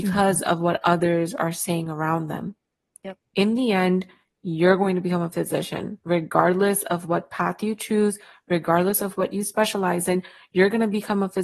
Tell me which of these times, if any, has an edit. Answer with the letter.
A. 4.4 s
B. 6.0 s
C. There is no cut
B